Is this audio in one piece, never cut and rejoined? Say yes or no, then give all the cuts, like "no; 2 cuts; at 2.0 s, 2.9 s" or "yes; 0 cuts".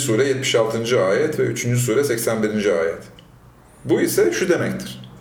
yes; 0 cuts